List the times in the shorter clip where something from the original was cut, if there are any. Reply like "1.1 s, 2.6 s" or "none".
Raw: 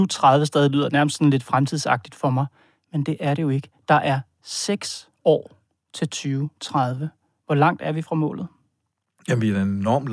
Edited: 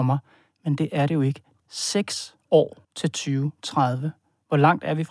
1.6 s, 2.8 s